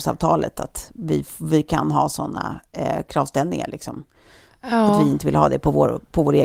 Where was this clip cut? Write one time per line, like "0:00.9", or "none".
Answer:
none